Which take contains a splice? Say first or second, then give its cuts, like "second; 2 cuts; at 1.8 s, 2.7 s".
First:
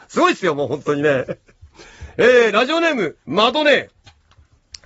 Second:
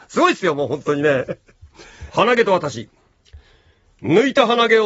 second; 1 cut; at 2.1 s